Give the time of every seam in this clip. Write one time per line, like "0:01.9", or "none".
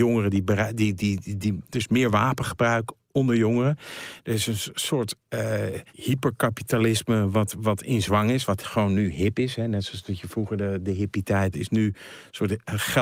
0:05.9
0:11.5